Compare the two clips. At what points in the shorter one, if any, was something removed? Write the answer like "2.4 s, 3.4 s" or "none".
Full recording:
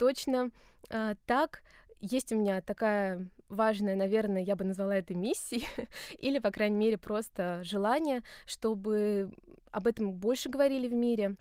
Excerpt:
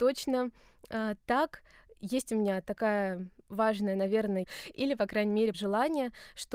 4.4 s, 5.5 s